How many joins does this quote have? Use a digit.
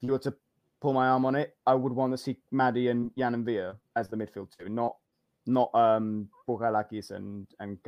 0